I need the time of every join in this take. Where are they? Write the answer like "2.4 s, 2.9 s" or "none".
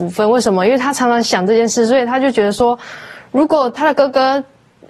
none

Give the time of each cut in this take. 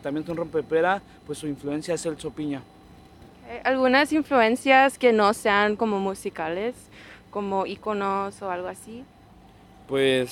none

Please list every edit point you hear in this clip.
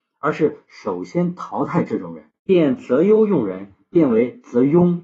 2.4 s

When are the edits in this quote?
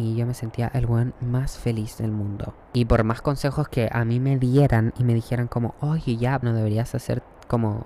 2.6 s, 6.4 s

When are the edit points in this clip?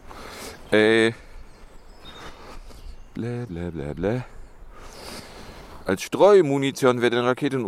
3.5 s

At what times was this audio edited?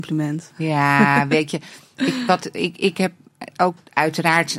none

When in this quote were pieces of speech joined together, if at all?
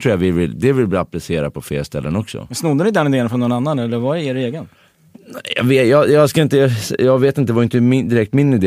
none

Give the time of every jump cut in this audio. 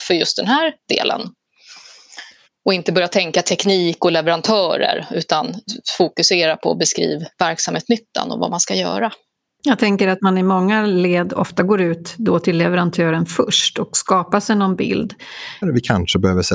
15.6 s

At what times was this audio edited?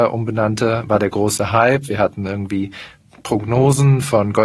none

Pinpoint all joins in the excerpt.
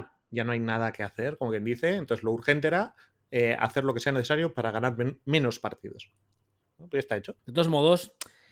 7.4 s

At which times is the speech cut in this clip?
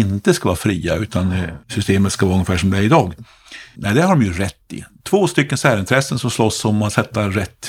1.6 s, 3.7 s, 5.0 s

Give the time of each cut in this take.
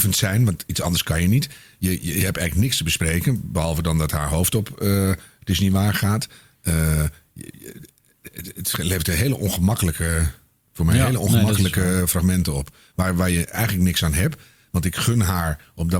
none

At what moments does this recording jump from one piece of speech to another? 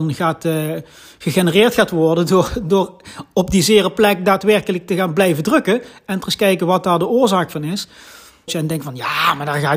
8.5 s

